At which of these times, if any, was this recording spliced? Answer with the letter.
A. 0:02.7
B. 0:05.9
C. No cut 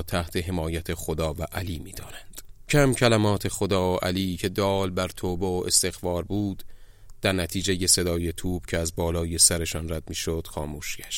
A